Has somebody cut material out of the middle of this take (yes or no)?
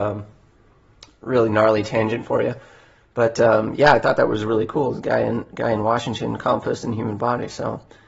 no